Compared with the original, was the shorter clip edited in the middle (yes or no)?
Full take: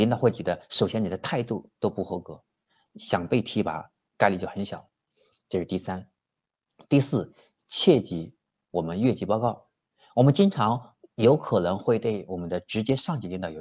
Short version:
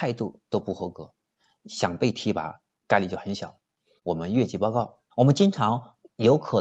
yes